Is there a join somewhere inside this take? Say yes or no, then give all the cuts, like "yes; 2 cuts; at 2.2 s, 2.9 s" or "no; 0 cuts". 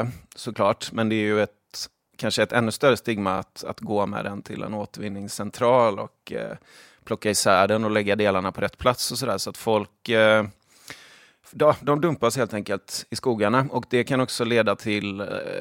no; 0 cuts